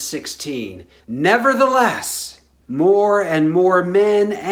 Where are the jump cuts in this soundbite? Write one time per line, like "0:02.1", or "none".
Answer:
0:01.0